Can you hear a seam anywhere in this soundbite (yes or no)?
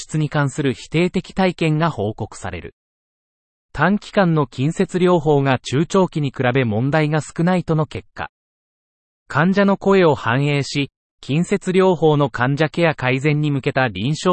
no